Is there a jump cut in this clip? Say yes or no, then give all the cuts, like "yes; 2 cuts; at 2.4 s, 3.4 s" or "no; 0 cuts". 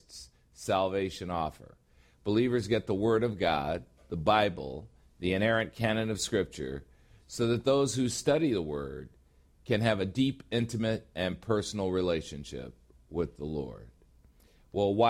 no; 0 cuts